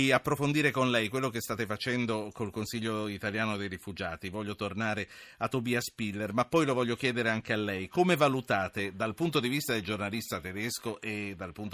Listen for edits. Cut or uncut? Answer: uncut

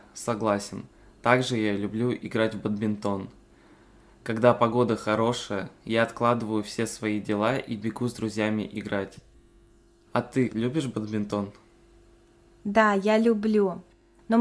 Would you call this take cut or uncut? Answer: cut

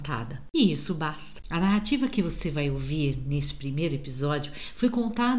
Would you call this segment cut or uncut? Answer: cut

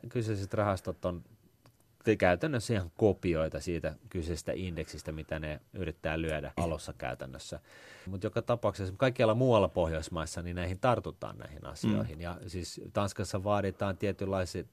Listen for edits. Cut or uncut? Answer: cut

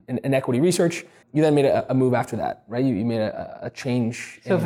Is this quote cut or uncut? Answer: cut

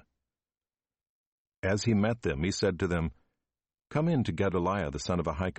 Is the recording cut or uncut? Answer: uncut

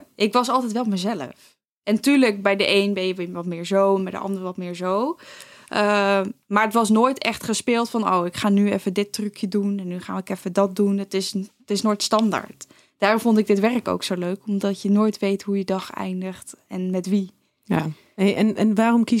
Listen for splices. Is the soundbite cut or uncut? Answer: uncut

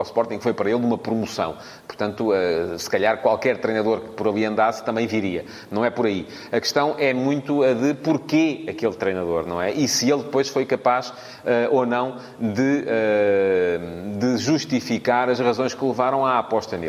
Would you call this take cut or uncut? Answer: uncut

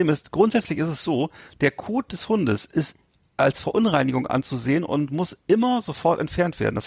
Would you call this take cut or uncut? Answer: uncut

